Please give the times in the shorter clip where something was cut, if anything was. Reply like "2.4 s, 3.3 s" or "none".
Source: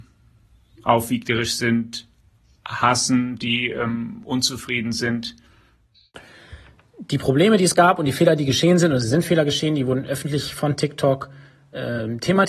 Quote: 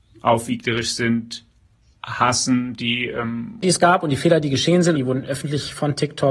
3.6 s, 5.0 s